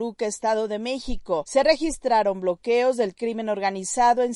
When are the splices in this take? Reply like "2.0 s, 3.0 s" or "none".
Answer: none